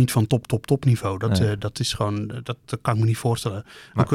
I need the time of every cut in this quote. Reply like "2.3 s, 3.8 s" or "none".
none